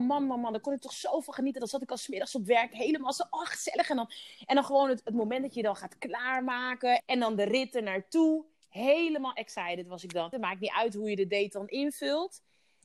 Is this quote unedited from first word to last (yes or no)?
no